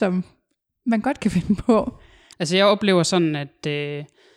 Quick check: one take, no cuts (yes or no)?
no